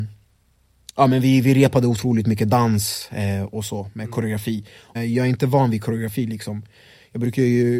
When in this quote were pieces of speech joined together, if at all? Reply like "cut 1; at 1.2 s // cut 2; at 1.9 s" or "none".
cut 1; at 5.0 s